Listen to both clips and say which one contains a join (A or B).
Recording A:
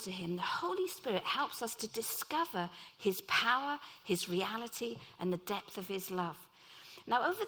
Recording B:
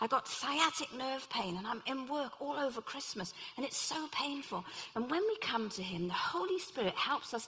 B